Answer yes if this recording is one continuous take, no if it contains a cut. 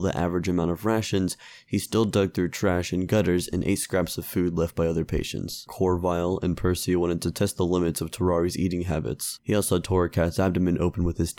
no